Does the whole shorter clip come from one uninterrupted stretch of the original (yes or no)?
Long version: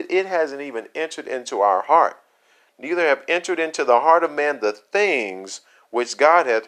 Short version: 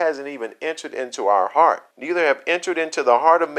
no